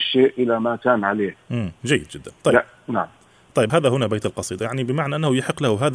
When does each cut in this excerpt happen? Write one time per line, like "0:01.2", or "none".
0:01.8